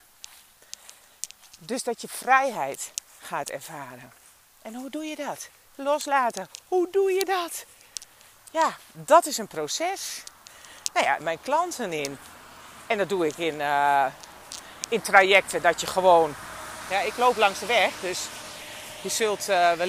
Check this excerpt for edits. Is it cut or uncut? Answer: cut